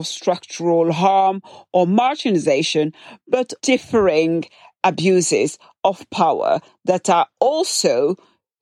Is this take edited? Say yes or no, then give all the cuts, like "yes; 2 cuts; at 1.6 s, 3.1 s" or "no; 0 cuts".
yes; 1 cut; at 3.6 s